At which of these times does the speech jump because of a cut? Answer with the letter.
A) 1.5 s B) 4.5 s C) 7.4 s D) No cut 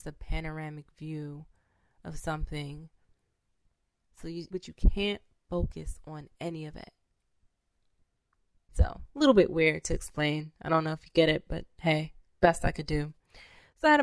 B